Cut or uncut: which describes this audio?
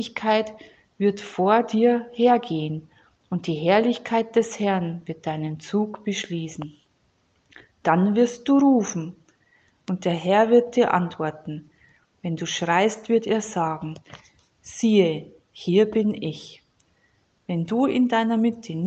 uncut